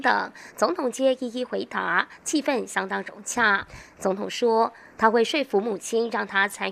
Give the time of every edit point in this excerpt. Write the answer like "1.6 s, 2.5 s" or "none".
none